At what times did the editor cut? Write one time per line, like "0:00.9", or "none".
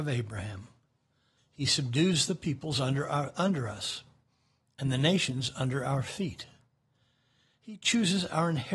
0:01.4